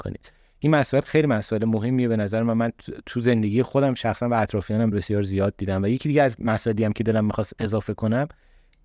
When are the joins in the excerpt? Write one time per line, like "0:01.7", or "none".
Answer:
0:04.9